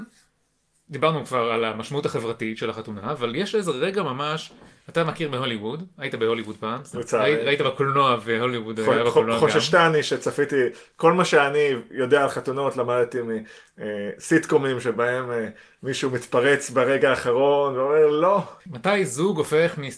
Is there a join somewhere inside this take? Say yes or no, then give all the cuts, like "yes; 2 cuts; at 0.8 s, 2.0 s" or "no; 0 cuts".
no; 0 cuts